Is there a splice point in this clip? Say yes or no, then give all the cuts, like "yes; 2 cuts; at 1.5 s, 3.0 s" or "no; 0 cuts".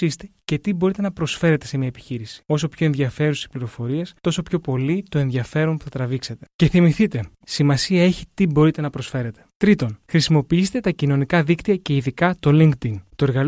yes; 1 cut; at 7.4 s